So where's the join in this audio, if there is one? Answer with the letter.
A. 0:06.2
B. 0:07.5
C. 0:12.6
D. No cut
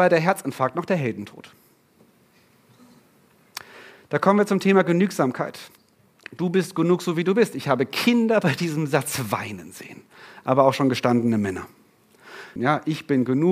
C